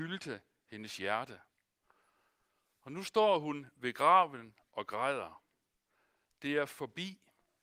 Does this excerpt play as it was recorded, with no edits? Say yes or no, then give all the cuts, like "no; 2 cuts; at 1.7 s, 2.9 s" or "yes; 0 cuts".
yes; 0 cuts